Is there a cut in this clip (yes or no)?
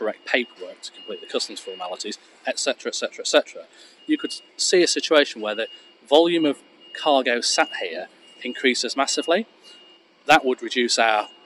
no